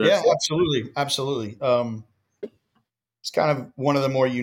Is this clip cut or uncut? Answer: uncut